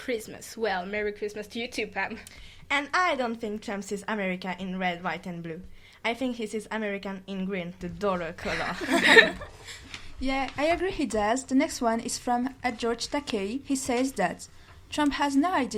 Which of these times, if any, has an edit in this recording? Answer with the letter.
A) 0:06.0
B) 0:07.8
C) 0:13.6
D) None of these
B